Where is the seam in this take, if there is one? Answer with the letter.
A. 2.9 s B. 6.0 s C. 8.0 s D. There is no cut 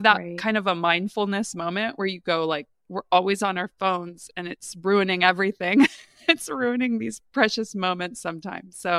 A